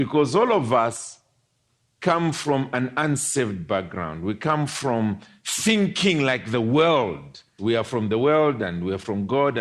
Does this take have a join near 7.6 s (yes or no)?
yes